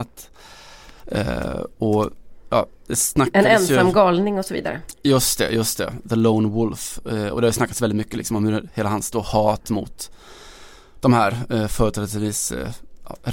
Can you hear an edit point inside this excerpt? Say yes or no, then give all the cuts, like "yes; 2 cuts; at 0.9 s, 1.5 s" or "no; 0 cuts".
yes; 1 cut; at 1.0 s